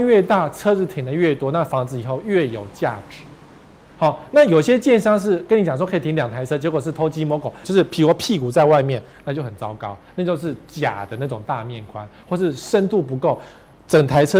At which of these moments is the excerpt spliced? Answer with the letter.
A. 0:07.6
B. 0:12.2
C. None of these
A